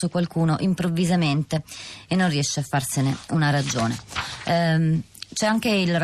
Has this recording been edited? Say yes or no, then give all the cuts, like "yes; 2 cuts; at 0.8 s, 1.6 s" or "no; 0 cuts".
no; 0 cuts